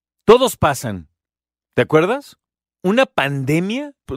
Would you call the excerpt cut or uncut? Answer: uncut